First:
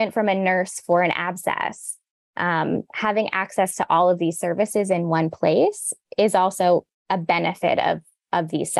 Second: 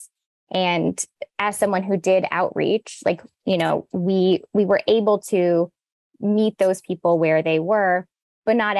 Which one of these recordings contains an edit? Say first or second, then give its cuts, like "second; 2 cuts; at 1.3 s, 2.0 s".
first; 1 cut; at 6.9 s